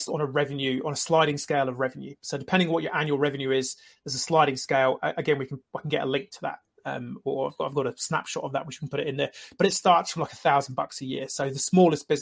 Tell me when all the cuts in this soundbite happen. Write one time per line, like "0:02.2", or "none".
none